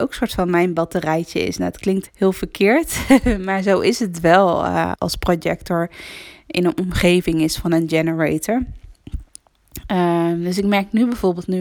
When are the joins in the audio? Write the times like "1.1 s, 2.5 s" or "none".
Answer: 2.1 s, 4.9 s